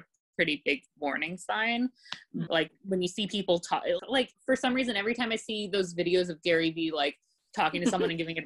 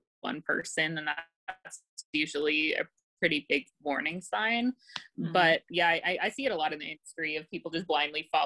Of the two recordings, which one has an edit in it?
first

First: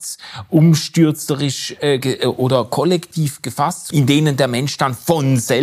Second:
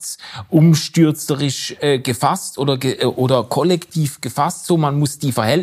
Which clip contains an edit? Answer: first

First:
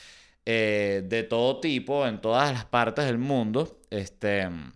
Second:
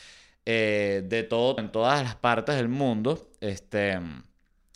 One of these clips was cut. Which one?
second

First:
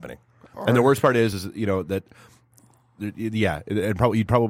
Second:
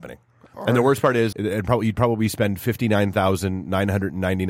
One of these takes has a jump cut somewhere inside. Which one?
second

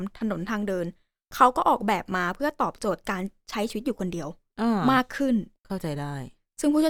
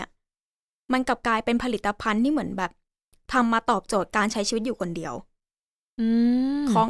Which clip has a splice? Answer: first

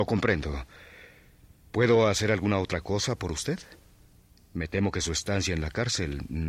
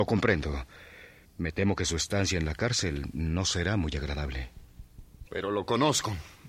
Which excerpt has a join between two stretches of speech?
second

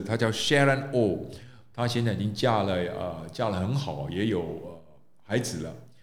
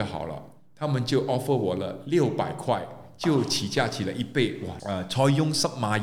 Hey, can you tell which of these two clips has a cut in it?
second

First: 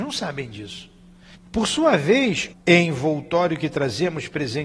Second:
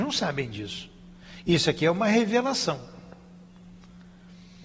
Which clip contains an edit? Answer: first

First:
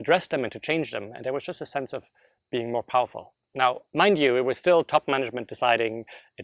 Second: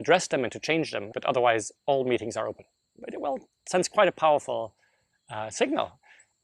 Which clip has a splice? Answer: second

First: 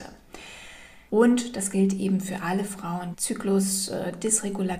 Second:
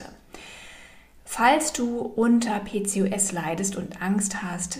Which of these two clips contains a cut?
first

